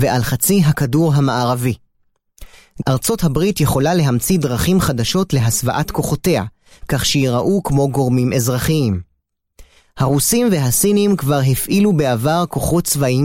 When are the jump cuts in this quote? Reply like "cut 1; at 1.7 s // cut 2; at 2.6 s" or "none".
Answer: cut 1; at 2.8 s